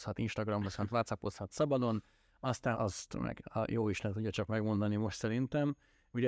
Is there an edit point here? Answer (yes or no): yes